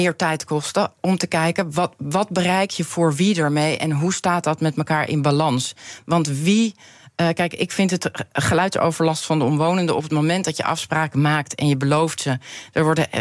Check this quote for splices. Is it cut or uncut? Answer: uncut